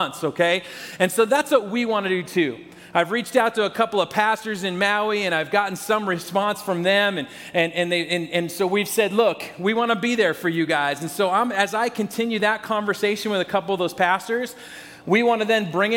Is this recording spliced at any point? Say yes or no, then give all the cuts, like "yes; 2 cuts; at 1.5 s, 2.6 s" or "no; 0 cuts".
no; 0 cuts